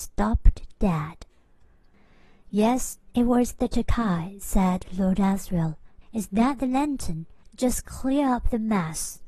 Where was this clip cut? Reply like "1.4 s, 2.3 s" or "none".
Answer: 6.0 s, 7.4 s

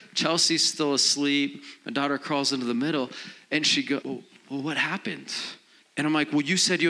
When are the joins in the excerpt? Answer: 4.0 s, 5.8 s

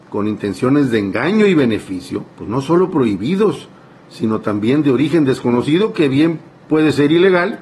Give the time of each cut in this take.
2.3 s

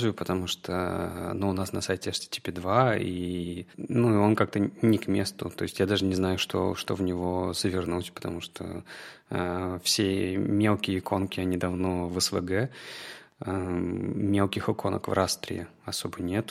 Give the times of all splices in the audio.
none

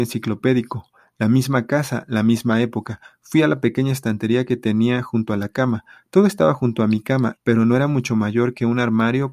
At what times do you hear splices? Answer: 7.4 s

